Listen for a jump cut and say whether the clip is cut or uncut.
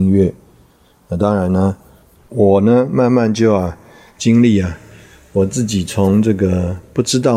cut